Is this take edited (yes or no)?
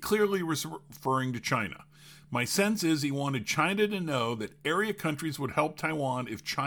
no